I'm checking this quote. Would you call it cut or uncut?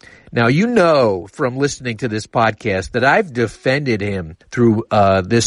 cut